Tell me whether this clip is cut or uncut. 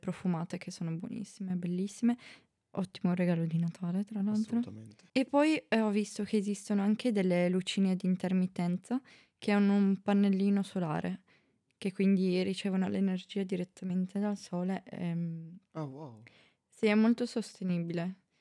uncut